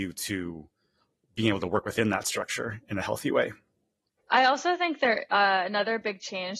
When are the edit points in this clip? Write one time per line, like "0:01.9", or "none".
0:04.2